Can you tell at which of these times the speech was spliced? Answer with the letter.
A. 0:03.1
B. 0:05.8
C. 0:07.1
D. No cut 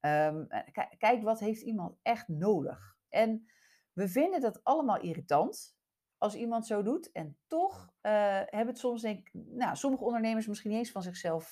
A